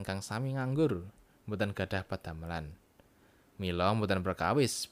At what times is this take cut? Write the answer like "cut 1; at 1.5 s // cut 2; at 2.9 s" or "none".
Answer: none